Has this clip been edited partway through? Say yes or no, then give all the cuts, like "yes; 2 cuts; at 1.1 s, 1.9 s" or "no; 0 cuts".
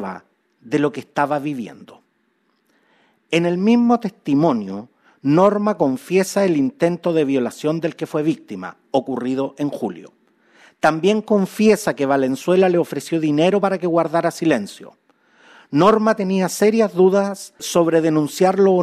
no; 0 cuts